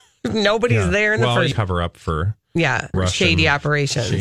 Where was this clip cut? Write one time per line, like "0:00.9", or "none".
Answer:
0:01.5
0:02.9